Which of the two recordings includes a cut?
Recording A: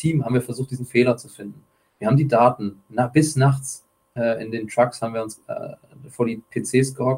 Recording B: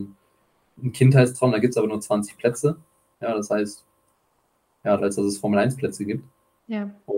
B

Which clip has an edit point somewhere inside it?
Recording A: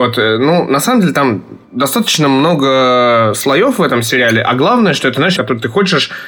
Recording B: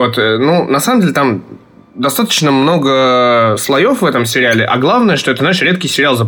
A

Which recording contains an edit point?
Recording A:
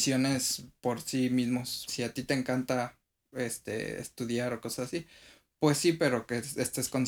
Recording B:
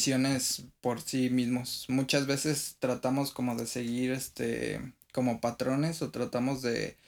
A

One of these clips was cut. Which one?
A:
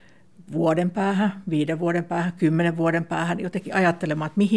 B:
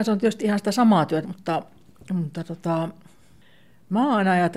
B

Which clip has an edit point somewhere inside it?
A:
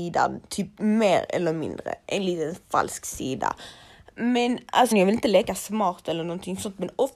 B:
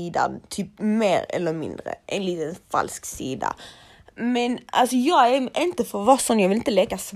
A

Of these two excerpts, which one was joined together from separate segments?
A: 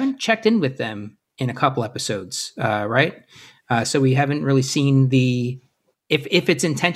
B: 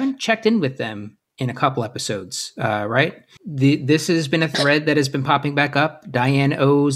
B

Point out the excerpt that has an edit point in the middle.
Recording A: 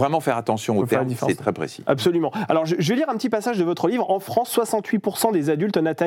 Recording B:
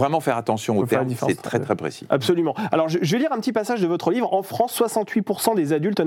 A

